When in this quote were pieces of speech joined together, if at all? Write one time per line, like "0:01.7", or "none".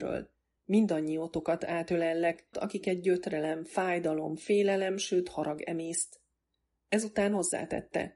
0:02.5